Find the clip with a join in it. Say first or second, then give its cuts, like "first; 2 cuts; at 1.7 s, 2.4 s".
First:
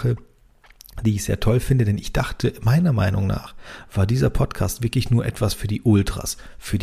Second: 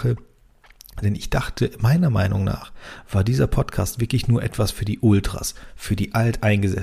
second; 1 cut; at 1.0 s